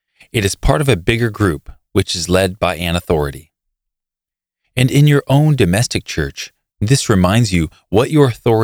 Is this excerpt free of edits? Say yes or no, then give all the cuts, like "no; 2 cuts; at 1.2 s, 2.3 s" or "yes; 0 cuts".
no; 1 cut; at 6.7 s